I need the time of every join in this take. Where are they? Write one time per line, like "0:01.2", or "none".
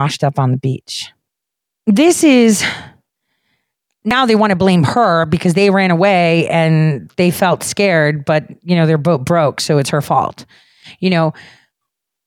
none